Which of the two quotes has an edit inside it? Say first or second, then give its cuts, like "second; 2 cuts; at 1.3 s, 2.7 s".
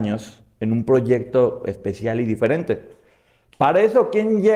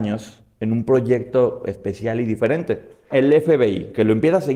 second; 1 cut; at 3.1 s